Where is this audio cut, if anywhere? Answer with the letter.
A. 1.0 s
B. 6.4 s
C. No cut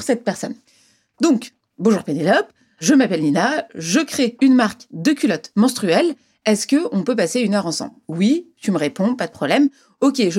C